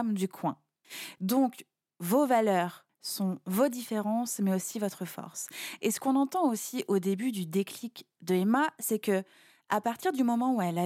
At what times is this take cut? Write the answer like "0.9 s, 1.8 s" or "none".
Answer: none